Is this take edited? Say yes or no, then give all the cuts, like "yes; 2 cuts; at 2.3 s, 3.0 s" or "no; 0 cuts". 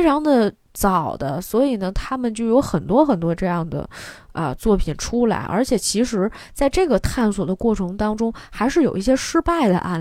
no; 0 cuts